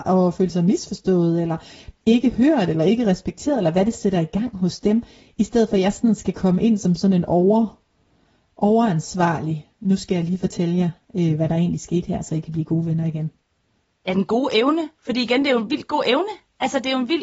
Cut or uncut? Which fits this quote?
uncut